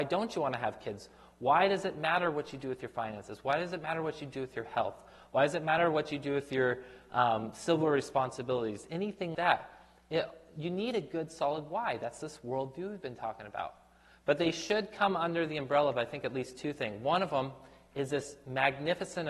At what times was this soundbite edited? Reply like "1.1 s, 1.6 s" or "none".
9.3 s